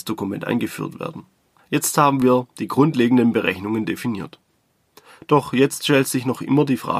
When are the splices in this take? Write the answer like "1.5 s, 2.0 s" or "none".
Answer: 1.6 s